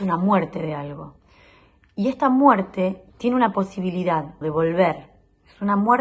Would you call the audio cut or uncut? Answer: cut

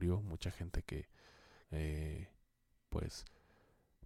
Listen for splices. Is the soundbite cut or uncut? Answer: cut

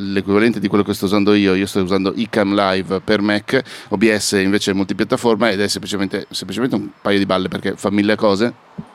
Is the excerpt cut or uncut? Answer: uncut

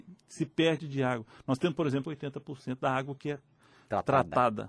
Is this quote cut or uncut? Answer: cut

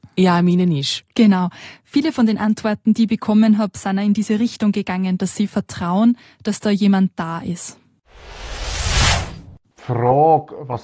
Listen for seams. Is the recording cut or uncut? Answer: uncut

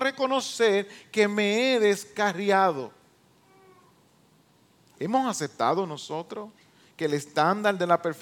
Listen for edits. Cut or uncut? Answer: uncut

